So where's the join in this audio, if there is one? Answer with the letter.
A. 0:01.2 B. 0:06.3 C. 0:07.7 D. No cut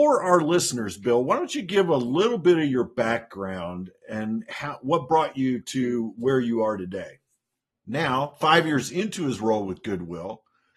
C